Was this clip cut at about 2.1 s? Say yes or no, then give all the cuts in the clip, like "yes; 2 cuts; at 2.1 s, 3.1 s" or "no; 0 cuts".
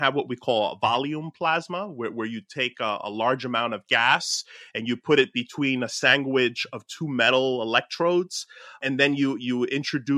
no; 0 cuts